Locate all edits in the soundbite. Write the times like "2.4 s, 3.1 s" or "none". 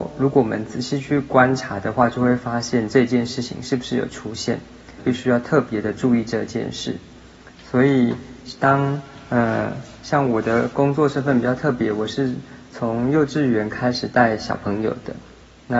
5.0 s